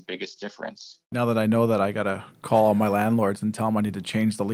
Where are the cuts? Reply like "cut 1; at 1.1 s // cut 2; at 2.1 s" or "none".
cut 1; at 1.0 s